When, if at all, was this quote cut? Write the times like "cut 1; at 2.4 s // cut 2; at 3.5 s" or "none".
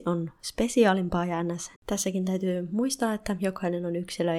cut 1; at 1.8 s